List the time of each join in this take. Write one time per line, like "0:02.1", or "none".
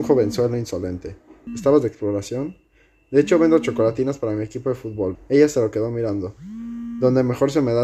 0:01.5
0:05.1